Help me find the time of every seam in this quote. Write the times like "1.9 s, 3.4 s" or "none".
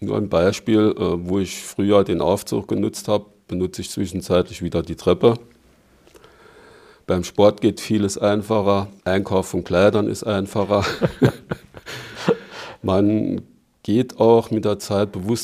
9.0 s